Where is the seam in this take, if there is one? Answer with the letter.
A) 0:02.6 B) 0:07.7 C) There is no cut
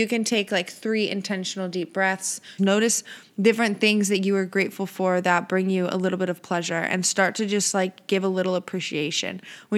A